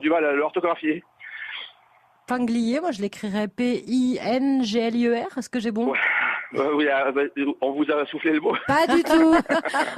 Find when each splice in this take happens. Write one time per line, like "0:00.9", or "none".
none